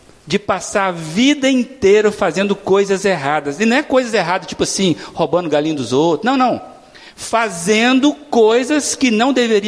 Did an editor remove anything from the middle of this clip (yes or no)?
no